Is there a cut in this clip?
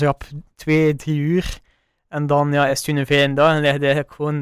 no; 0 cuts

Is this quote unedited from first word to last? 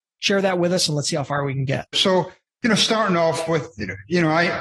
no; 1 cut; at 1.9 s

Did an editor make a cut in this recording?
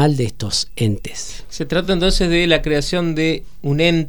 no; 0 cuts

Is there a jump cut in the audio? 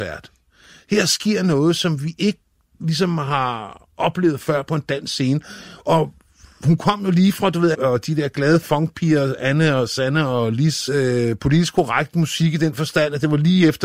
yes; 2 cuts; at 7.7 s, 10.9 s

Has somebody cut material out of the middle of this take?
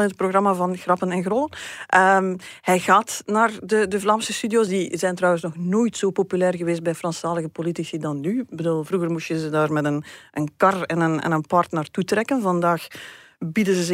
no; 0 cuts

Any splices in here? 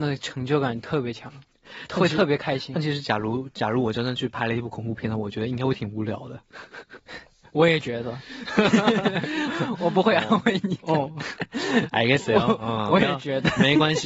no; 0 cuts

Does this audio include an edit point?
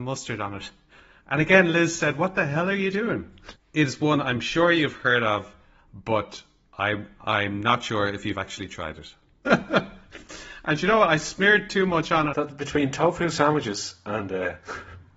yes; 3 cuts; at 3.6 s, 9.5 s, 12.3 s

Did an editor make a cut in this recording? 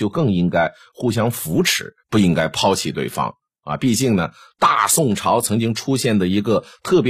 yes; 1 cut; at 2.0 s

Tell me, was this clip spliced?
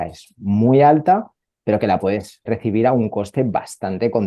yes; 1 cut; at 2.5 s

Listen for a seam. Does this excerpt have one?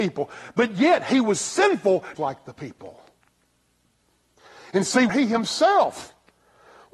yes; 2 cuts; at 2.2 s, 5.1 s

